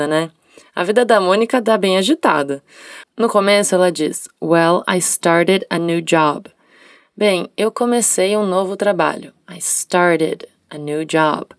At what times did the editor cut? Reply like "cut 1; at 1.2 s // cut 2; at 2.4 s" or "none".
cut 1; at 3.0 s